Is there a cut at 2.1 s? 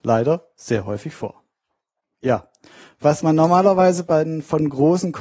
yes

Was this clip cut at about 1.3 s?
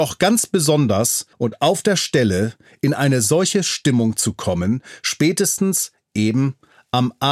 yes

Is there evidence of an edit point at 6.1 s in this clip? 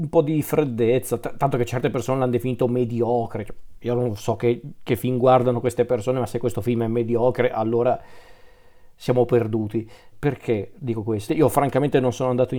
no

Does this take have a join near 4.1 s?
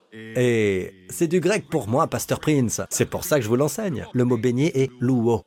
yes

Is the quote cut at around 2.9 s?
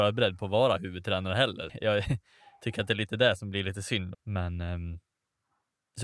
no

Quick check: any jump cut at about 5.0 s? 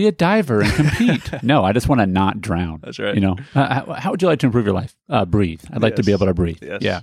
no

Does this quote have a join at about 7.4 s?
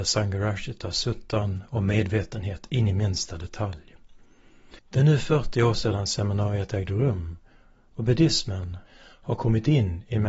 no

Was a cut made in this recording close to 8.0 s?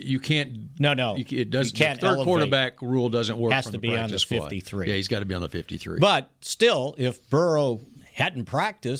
yes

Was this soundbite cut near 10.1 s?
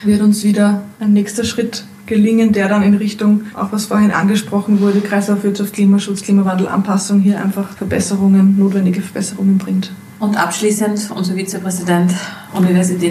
no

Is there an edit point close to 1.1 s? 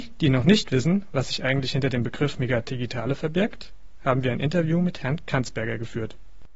no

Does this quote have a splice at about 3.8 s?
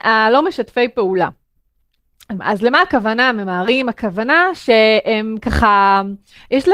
no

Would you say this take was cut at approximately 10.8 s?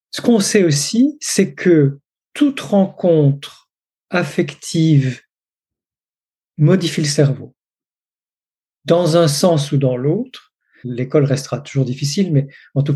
yes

